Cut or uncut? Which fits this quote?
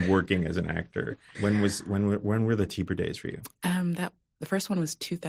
cut